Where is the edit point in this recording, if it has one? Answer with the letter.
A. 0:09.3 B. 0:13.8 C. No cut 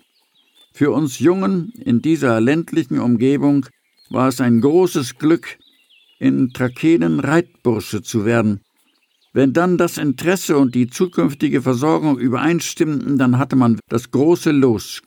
B